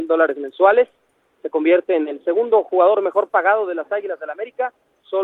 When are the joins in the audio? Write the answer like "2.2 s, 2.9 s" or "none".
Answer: none